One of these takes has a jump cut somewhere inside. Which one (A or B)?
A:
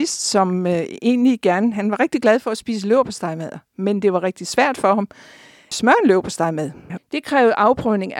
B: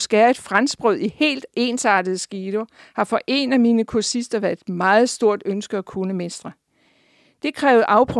A